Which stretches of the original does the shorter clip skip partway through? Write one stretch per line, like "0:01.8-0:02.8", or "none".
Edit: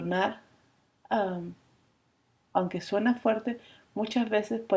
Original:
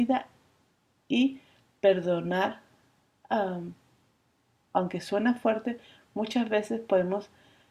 none

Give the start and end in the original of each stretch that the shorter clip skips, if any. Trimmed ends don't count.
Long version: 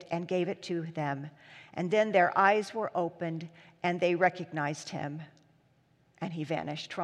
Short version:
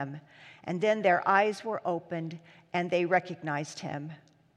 none

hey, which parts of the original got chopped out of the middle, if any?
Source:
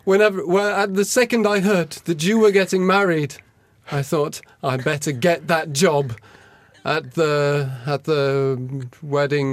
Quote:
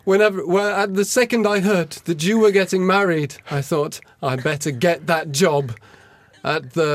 0:03.4-0:03.8

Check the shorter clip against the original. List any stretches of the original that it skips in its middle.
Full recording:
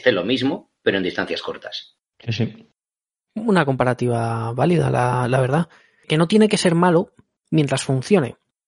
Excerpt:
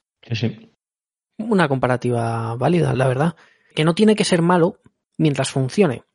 0:04.9-0:05.3

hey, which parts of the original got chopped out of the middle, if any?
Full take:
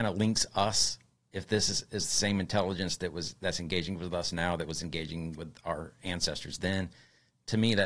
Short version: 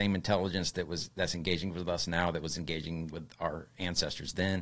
none

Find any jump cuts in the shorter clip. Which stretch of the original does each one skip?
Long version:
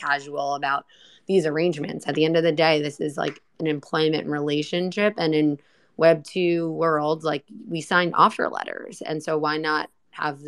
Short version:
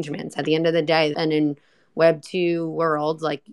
0:02.8-0:05.1

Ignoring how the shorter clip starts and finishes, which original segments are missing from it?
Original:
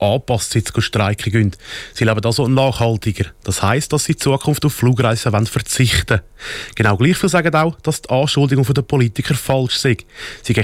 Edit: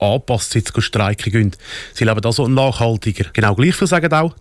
0:03.3-0:06.7

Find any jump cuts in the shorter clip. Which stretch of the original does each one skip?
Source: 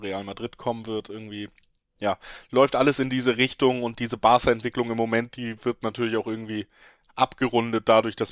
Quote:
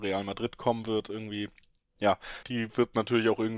0:02.4-0:05.3

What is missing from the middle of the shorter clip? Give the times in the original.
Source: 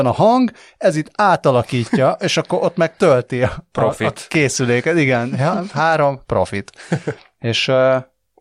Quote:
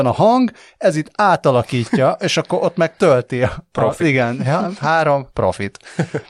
0:04.0-0:04.9

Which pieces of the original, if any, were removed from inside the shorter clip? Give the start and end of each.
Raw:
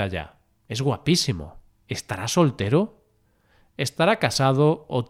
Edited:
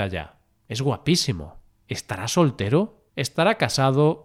0:03.1-0:03.7

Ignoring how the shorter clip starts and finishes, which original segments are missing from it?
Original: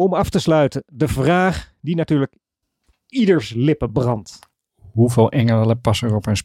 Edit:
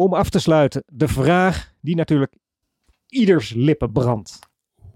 none

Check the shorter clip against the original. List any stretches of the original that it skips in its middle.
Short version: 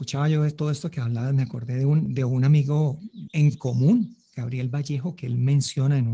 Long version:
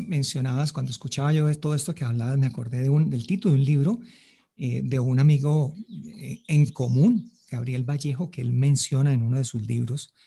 0:03.1-0:04.8
0:06.0-0:06.4

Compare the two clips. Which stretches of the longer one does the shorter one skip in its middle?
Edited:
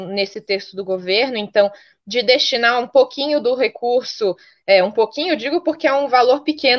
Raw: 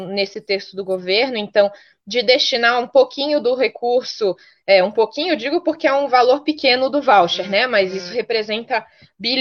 none

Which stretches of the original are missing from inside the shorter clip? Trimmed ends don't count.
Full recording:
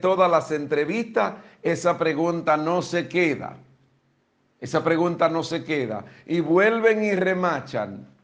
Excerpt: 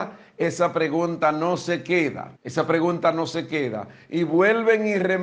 0:03.6-0:04.5

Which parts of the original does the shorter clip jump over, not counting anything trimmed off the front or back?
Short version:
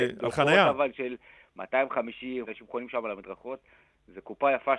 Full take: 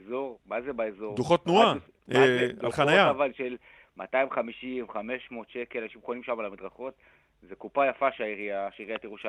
0:04.9-0:05.8

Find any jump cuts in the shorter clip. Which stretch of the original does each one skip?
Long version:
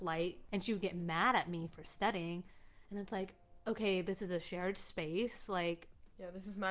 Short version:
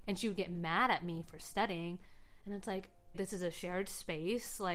0:03.6-0:04.0

